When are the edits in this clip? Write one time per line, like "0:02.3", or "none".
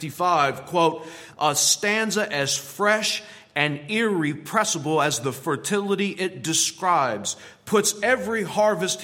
0:01.3